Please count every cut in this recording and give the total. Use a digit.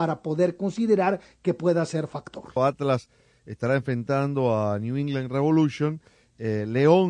1